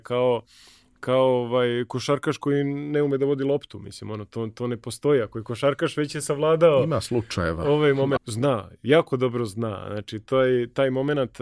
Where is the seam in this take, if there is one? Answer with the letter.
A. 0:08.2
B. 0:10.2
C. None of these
A